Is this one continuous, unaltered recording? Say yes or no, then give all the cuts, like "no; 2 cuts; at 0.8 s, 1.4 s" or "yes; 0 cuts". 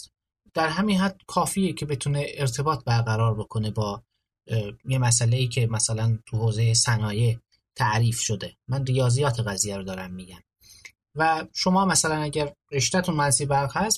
no; 1 cut; at 12.6 s